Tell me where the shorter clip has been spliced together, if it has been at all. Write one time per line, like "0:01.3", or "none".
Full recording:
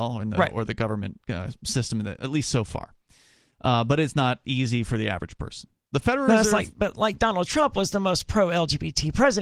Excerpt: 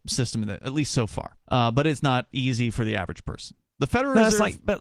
0:01.4